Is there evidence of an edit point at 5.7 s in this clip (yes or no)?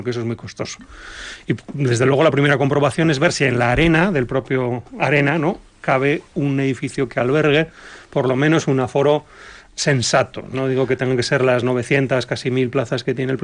no